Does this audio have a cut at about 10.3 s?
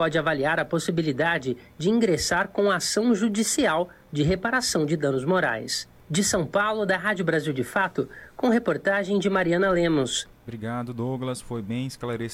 yes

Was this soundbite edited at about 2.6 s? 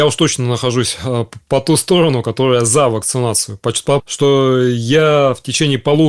no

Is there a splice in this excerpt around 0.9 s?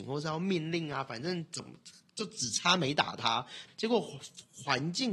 no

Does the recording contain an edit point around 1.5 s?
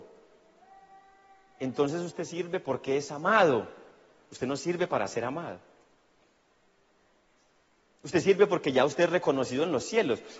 no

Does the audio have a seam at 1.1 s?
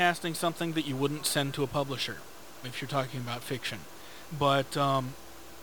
no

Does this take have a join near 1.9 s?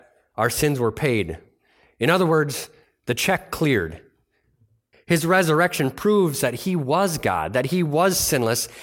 no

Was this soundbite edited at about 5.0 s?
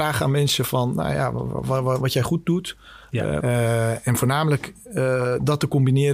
no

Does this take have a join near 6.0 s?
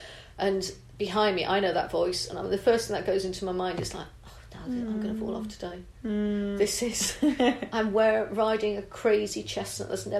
no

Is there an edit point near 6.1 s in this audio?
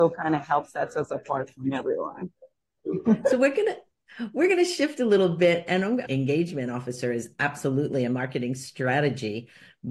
yes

